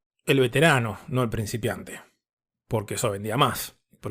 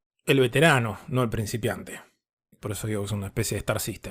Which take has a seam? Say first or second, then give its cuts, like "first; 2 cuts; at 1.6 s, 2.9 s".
second; 1 cut; at 2.5 s